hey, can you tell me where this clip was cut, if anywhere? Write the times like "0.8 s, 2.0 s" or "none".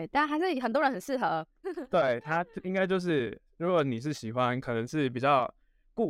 1.6 s